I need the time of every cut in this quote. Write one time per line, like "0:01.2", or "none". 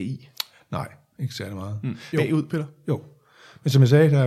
0:02.1